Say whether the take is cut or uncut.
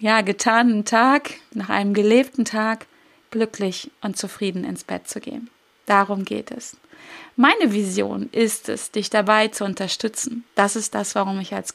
uncut